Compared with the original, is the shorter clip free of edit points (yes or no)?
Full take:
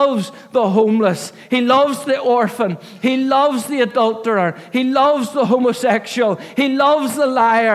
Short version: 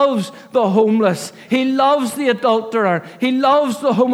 no